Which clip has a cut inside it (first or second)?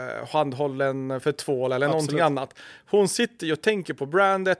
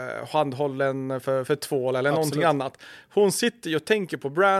first